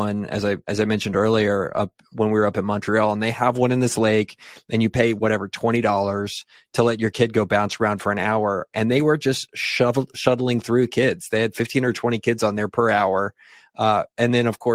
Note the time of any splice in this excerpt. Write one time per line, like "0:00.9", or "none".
none